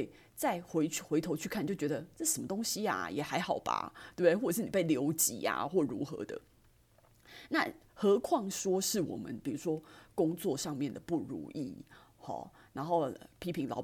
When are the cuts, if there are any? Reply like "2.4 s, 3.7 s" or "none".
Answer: none